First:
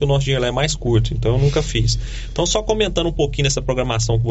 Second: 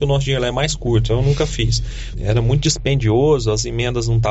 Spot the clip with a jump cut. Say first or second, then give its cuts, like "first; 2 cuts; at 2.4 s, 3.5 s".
second; 2 cuts; at 1.1 s, 2.1 s